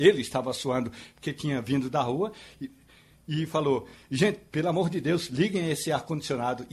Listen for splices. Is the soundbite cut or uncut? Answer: uncut